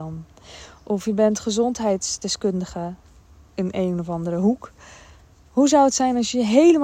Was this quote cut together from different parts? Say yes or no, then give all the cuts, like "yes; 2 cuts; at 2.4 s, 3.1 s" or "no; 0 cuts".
no; 0 cuts